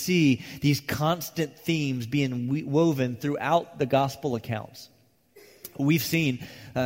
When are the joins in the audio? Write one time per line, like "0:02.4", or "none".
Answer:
none